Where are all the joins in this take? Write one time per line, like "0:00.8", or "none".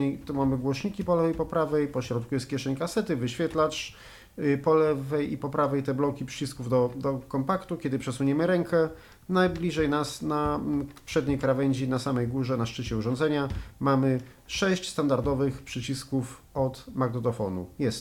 none